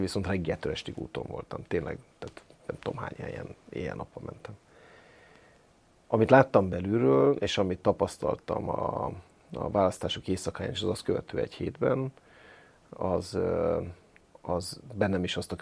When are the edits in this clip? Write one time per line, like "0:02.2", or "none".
none